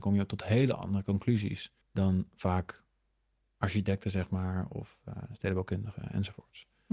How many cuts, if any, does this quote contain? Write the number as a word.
one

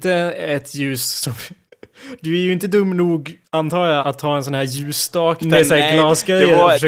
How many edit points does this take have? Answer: two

